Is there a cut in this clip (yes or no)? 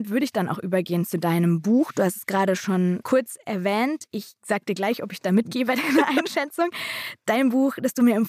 yes